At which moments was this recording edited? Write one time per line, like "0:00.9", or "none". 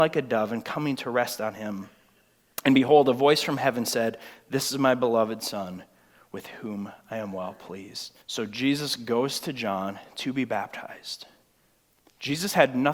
0:08.2